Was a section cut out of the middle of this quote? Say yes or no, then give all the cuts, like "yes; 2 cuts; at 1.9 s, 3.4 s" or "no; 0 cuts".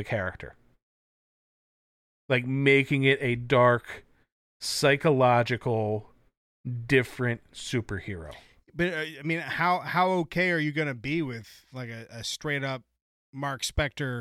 no; 0 cuts